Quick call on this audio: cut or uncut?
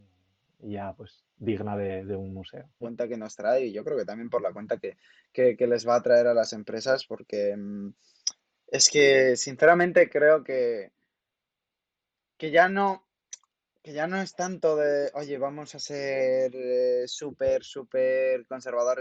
cut